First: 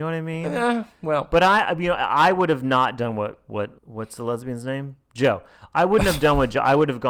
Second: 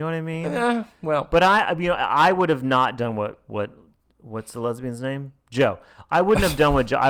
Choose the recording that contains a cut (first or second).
first